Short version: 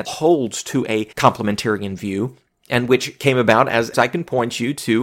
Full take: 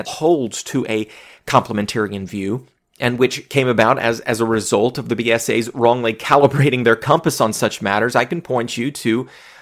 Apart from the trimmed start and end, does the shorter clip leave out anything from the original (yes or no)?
yes